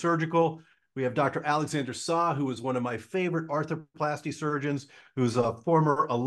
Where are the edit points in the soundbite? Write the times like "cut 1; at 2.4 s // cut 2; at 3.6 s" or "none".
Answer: none